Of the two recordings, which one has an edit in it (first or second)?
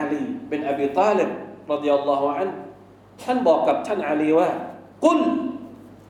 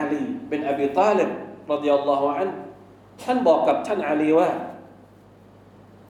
first